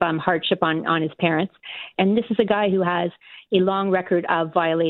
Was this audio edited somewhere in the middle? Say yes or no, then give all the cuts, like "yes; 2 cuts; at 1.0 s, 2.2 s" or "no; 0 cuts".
yes; 1 cut; at 2.0 s